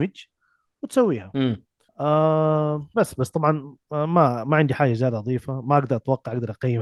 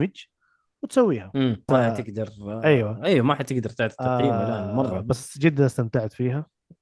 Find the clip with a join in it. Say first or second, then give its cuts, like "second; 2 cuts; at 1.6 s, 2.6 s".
second; 1 cut; at 1.7 s